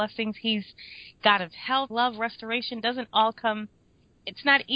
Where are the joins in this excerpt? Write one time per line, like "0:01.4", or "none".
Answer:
0:01.9